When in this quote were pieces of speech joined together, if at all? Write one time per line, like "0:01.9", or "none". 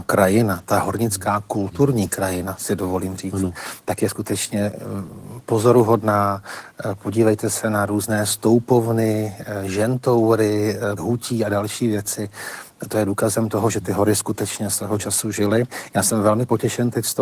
0:11.0